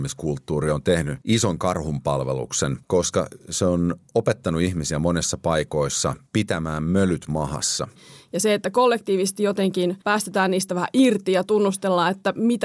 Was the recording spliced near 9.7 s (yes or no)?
no